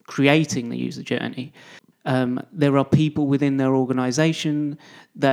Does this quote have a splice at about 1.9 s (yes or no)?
yes